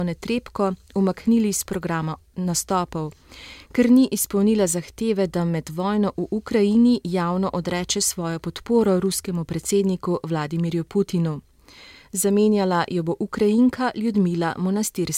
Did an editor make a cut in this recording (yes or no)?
no